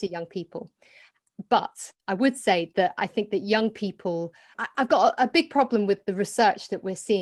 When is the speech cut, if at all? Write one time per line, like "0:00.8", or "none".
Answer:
0:02.0
0:04.5